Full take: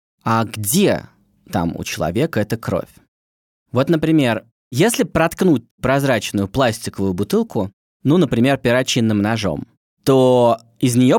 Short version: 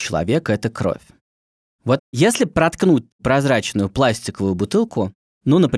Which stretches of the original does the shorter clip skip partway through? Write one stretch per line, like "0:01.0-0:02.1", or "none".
0:03.8-0:04.6